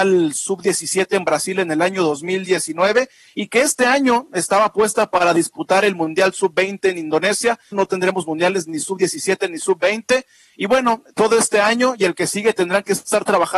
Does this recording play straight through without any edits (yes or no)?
no